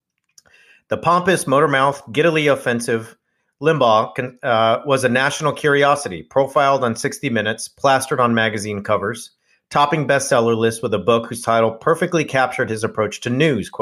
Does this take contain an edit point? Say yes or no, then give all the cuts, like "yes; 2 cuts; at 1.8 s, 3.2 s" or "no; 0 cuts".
no; 0 cuts